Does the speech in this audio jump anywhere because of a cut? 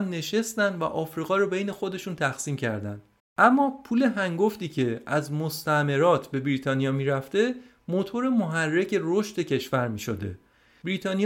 yes; 1 cut; at 3.2 s

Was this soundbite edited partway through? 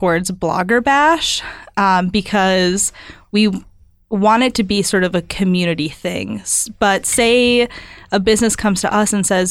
no; 0 cuts

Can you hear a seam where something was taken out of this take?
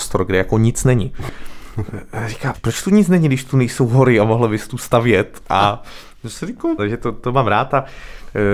yes; 2 cuts; at 2.5 s, 6.8 s

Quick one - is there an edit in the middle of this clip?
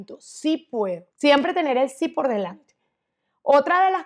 yes; 1 cut; at 1.1 s

